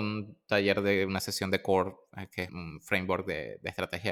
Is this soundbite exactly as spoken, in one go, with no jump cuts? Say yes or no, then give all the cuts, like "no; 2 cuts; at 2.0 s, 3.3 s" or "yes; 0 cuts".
no; 1 cut; at 2.5 s